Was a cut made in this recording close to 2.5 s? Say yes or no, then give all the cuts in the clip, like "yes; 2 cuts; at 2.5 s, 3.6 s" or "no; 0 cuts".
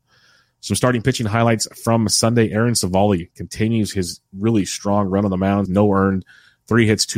no; 1 cut; at 5.7 s